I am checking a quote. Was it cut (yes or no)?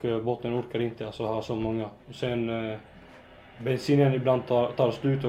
no